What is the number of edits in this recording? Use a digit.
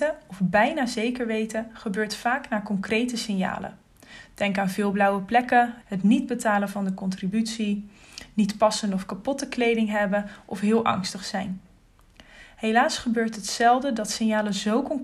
1